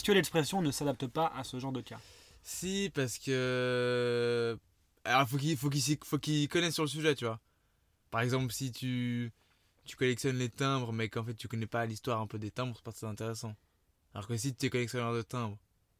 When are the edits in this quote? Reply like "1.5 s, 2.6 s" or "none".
none